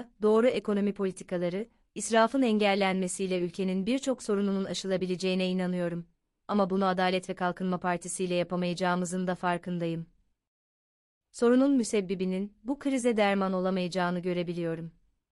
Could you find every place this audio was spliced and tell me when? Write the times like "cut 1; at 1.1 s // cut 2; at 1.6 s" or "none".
cut 1; at 1.8 s

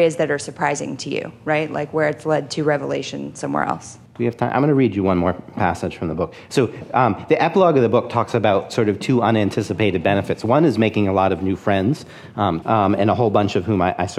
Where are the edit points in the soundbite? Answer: cut 1; at 12.6 s

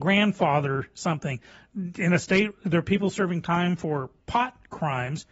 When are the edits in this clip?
cut 1; at 4.2 s

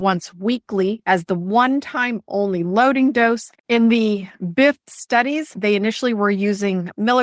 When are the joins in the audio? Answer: cut 1; at 3.6 s

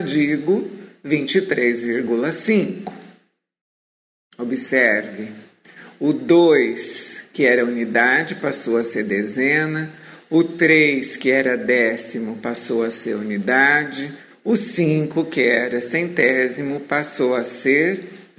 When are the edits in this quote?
none

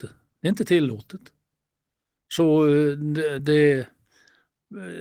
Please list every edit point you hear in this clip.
none

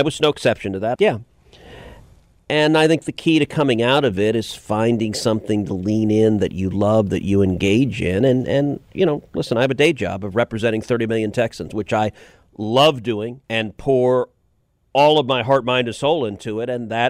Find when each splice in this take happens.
cut 1; at 0.9 s // cut 2; at 13.4 s

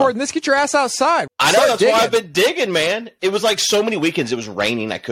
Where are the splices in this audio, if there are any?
cut 1; at 1.3 s

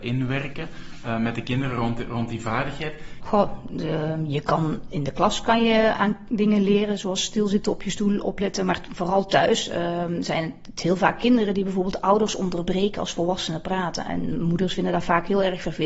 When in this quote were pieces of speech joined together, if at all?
cut 1; at 3.2 s

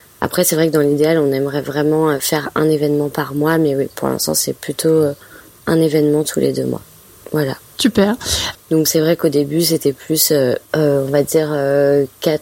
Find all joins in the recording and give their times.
cut 1; at 8.5 s

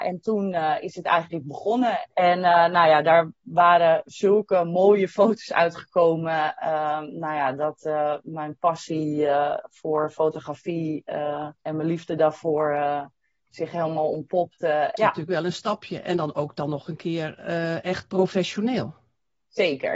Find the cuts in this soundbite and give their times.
cut 1; at 2.1 s // cut 2; at 11.6 s // cut 3; at 15.0 s

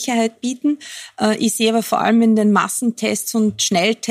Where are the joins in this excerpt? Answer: none

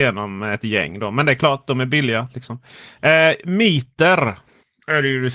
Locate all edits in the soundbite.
none

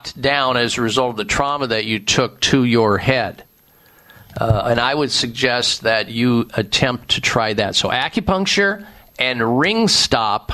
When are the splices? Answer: none

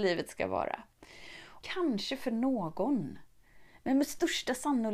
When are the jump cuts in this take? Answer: cut 1; at 1.6 s

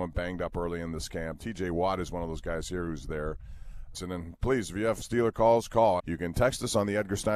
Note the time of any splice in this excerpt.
cut 1; at 3.9 s // cut 2; at 6.0 s

